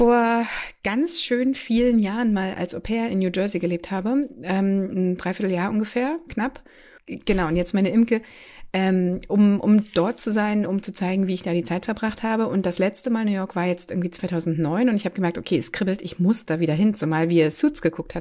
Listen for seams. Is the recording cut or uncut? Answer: cut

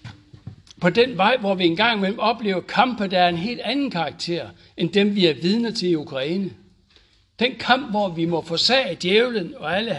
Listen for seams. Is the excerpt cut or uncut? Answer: uncut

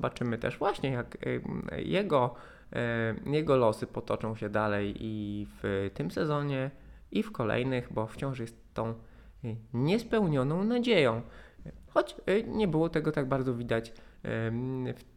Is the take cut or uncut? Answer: cut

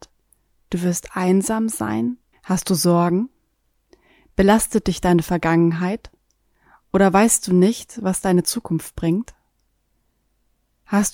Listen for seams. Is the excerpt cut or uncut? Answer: cut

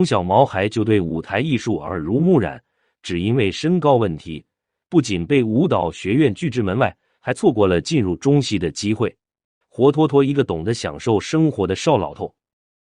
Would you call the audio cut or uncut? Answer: cut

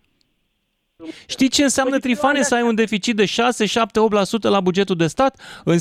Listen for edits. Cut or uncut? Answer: cut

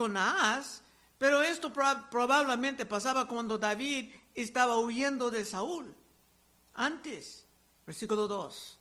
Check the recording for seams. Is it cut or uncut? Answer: cut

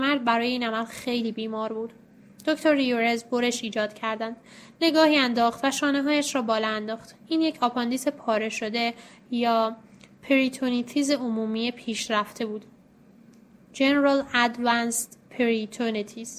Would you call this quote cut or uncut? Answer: cut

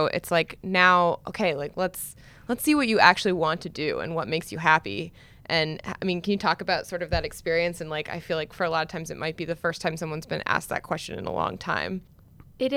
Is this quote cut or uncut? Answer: uncut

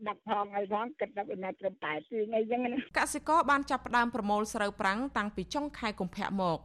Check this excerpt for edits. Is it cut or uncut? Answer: cut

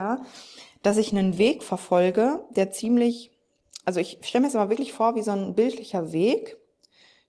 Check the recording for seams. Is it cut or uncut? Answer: uncut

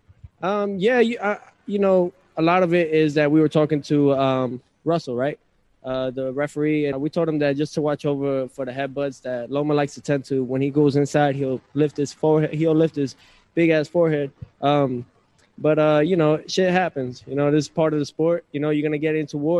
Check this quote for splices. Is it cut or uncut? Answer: cut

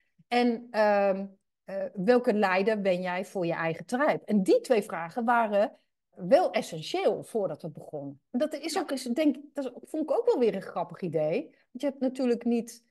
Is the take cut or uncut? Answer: cut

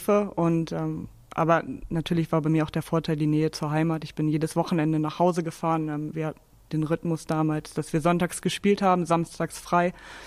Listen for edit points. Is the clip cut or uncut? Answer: uncut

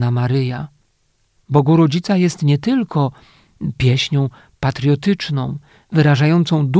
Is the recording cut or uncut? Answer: cut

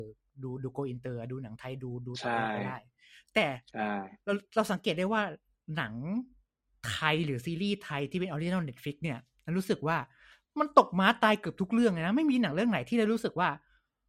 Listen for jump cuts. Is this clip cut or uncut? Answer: uncut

